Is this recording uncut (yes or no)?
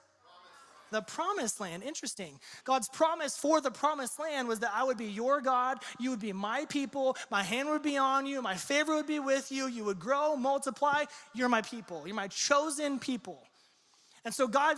no